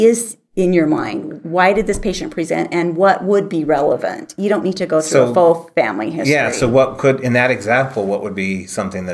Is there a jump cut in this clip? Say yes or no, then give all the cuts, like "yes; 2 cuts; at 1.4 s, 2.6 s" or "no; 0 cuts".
no; 0 cuts